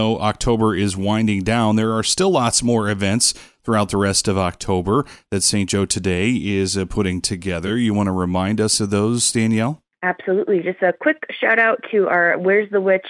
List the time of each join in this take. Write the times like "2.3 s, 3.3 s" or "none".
none